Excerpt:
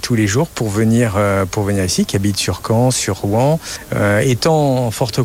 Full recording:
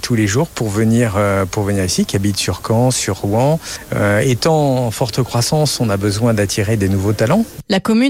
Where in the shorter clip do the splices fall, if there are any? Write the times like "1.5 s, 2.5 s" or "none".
none